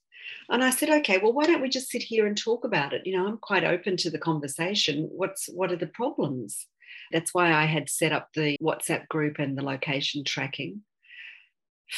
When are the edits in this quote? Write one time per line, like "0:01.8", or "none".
0:07.1
0:08.6